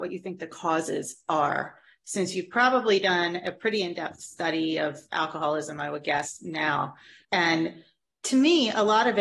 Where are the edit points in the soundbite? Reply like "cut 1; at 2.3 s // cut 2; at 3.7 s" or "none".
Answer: cut 1; at 7.2 s